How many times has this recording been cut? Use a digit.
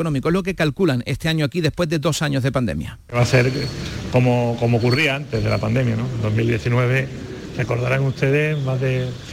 0